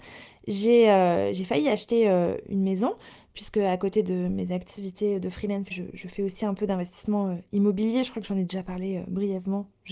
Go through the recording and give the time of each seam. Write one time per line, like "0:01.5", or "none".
0:02.4
0:05.7